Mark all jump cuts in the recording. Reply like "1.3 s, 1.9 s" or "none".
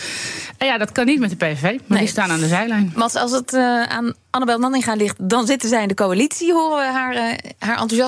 none